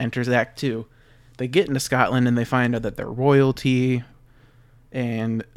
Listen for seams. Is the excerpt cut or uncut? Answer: uncut